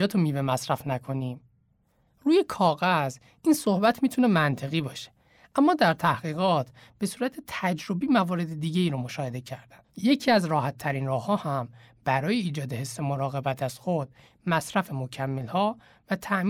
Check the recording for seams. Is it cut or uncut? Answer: cut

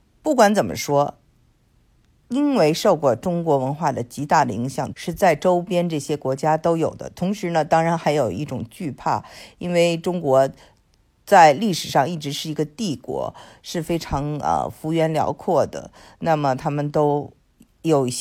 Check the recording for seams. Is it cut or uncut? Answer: cut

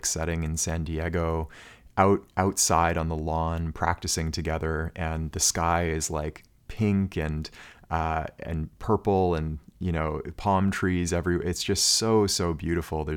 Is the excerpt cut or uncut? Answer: uncut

